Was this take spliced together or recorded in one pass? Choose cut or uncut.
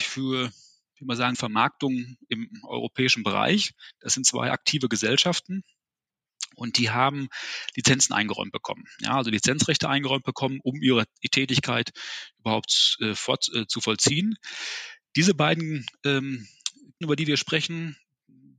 cut